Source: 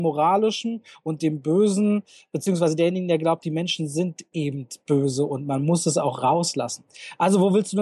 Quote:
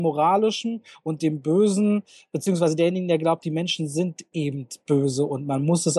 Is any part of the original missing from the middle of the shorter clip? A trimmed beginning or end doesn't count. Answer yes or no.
no